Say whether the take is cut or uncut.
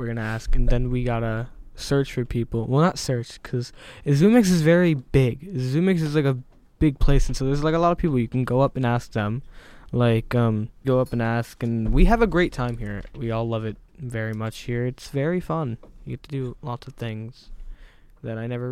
cut